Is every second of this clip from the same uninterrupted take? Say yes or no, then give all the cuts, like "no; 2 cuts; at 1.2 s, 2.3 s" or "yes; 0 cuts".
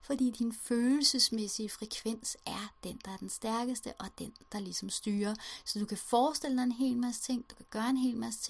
yes; 0 cuts